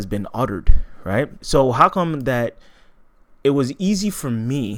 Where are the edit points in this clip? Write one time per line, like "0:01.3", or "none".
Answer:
0:01.4